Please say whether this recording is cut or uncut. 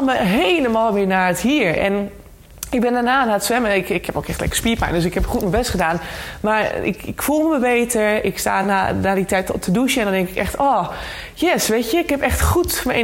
uncut